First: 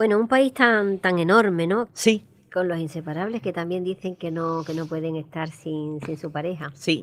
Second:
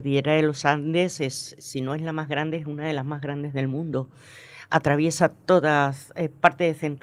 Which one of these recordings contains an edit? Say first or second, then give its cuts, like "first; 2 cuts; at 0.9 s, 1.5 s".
first; 1 cut; at 1.9 s